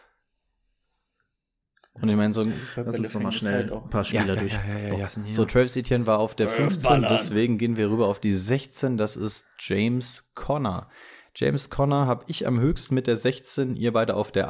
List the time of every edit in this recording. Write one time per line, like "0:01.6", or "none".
none